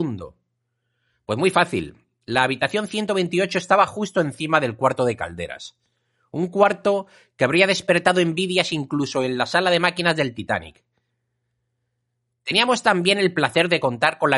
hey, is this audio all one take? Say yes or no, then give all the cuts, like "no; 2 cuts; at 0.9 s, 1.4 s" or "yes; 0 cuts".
yes; 0 cuts